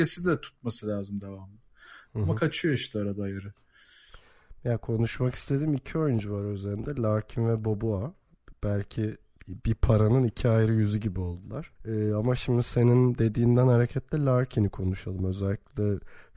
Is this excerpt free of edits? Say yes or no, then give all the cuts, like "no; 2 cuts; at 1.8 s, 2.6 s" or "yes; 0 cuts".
no; 1 cut; at 11.8 s